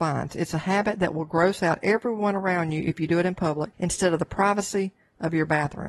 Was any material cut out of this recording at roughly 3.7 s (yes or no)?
yes